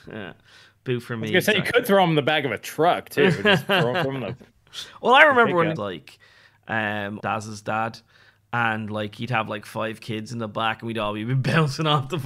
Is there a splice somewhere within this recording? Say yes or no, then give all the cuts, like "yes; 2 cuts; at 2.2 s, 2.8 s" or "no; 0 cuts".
yes; 2 cuts; at 5.8 s, 7.2 s